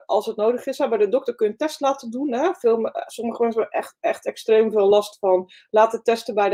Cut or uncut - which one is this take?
uncut